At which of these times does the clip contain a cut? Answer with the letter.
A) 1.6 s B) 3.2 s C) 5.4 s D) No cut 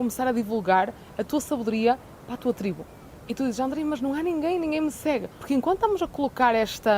C